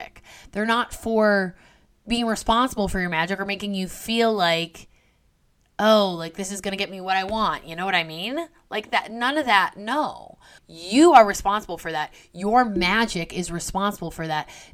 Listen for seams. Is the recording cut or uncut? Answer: cut